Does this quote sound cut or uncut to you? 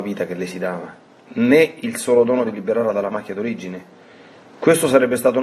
uncut